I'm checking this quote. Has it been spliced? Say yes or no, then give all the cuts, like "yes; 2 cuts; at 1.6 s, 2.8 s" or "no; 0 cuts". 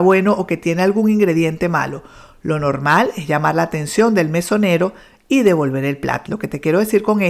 yes; 1 cut; at 6.3 s